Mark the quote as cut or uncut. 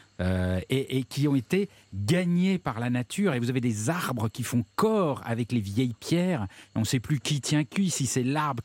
uncut